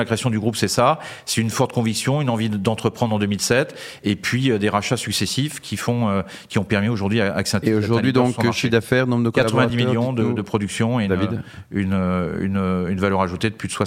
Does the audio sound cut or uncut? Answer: uncut